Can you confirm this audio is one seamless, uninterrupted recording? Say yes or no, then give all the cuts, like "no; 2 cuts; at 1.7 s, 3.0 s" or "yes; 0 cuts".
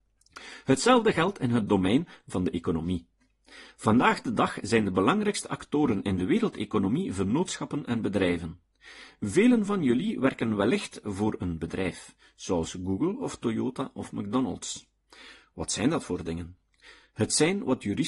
yes; 0 cuts